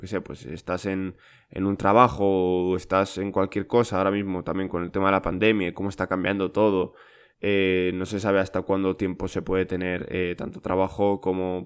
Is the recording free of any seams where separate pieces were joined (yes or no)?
no